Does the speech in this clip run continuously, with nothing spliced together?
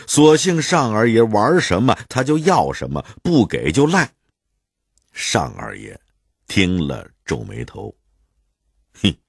no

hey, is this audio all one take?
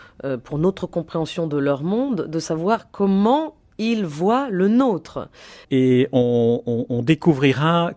no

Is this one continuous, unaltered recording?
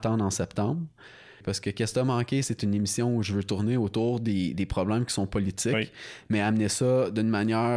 no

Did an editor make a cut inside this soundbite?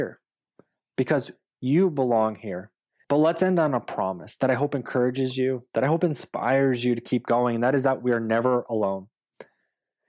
yes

